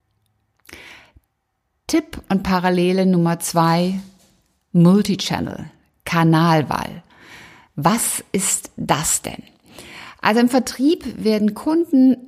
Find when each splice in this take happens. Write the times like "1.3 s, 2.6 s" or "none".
none